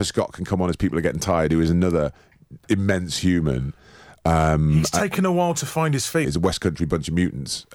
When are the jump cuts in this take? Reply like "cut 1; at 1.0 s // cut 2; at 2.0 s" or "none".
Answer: cut 1; at 6.2 s